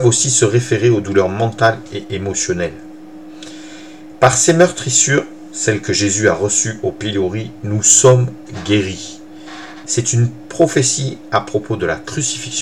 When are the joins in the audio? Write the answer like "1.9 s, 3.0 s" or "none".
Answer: 9.8 s